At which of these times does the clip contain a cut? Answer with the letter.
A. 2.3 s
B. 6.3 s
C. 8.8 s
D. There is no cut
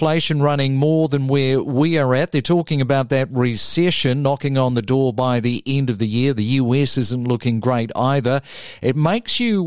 D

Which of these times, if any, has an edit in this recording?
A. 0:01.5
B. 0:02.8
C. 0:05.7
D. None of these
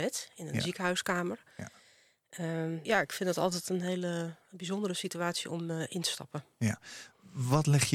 B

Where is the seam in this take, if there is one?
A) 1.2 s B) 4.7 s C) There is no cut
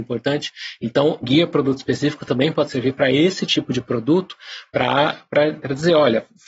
A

